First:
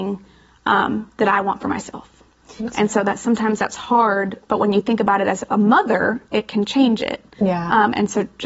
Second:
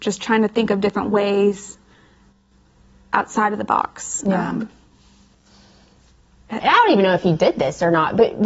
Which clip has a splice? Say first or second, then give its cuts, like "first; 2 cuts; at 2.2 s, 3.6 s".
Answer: second; 1 cut; at 6.6 s